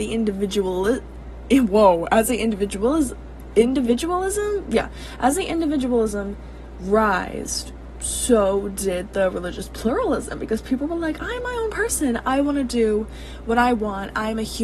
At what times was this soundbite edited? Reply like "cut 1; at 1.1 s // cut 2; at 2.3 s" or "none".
none